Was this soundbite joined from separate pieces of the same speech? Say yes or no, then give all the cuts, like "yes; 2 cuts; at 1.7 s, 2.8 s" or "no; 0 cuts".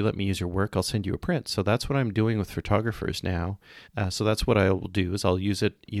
yes; 1 cut; at 3.9 s